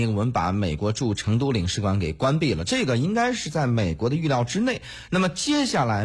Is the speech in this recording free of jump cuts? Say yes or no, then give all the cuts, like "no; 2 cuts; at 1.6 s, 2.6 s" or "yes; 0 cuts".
yes; 0 cuts